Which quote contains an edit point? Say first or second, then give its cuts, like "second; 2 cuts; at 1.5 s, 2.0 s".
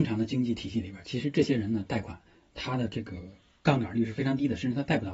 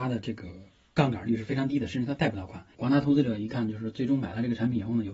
second; 1 cut; at 2.7 s